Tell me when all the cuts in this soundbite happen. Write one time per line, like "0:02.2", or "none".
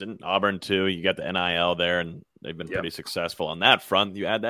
none